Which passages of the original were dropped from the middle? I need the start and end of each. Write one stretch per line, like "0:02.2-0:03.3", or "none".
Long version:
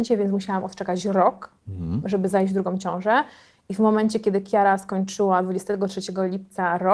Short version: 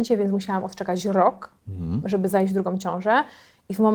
none